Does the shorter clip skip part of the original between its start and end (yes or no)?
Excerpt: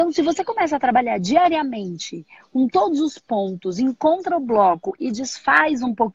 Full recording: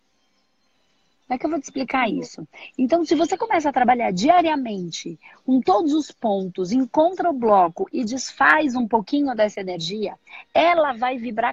no